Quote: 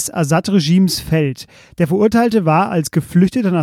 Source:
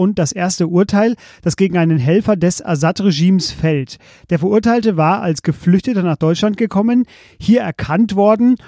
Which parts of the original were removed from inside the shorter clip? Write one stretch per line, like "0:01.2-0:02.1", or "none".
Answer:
none